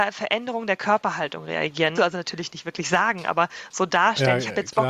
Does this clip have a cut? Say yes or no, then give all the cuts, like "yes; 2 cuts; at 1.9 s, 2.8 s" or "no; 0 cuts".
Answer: yes; 1 cut; at 2.0 s